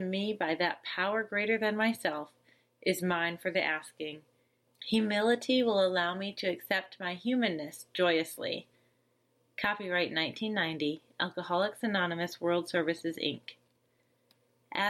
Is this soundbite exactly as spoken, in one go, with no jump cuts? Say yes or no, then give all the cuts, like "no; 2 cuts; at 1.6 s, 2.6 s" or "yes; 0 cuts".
no; 1 cut; at 4.6 s